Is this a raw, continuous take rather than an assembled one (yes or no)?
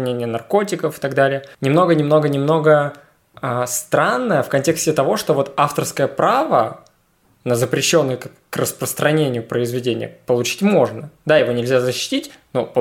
yes